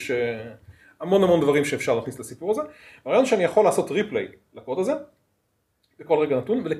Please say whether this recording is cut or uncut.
uncut